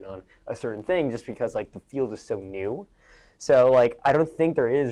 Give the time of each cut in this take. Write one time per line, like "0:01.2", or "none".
none